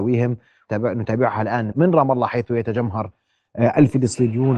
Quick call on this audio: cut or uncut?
cut